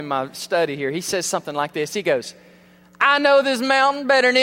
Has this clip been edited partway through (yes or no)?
no